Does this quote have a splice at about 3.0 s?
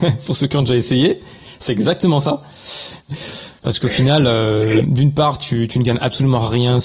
yes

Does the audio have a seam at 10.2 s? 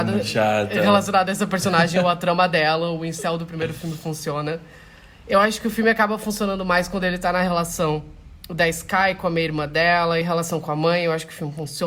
yes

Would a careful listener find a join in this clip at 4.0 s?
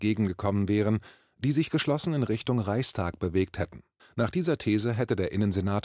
yes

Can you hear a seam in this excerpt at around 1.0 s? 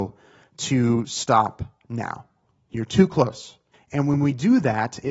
no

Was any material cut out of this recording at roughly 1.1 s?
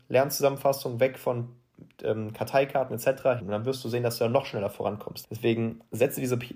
no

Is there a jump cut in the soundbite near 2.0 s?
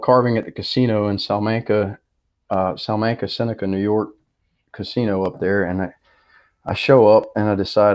no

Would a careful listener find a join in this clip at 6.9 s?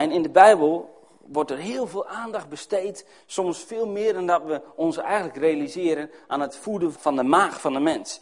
yes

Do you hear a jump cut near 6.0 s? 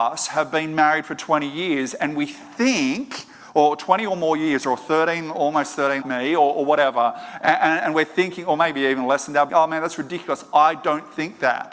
yes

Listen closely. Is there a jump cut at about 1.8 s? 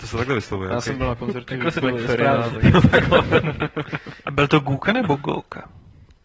yes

